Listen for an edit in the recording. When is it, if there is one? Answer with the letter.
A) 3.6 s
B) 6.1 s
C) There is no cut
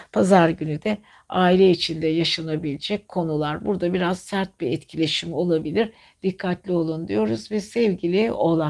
C